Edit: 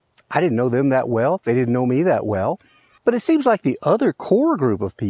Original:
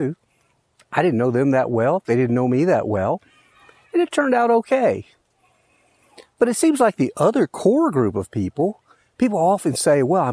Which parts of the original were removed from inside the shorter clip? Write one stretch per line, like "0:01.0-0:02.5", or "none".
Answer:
0:03.6-0:06.3